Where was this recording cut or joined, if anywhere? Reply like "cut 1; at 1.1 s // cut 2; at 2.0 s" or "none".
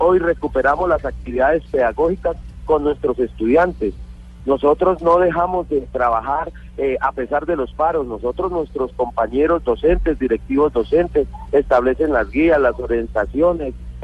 none